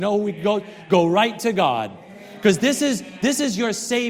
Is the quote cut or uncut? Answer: uncut